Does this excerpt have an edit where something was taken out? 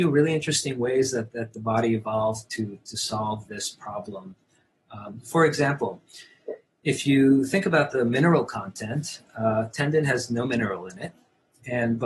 no; 0 cuts

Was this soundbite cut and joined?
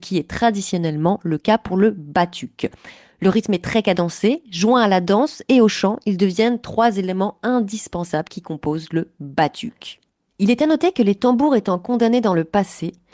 no; 0 cuts

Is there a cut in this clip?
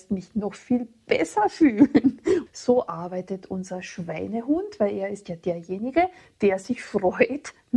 yes; 1 cut; at 2.5 s

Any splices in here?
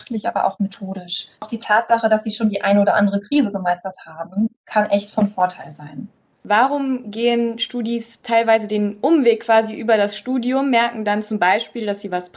no; 0 cuts

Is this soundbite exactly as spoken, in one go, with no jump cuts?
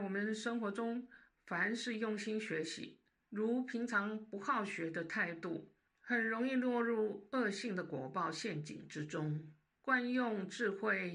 no; 3 cuts; at 3.2 s, 5.9 s, 9.7 s

